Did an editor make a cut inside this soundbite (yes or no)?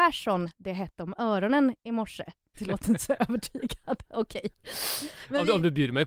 yes